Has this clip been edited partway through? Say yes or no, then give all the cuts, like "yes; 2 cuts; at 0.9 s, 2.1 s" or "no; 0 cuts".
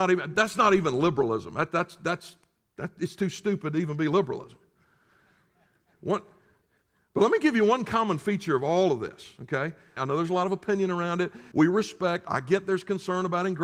yes; 2 cuts; at 10.0 s, 11.5 s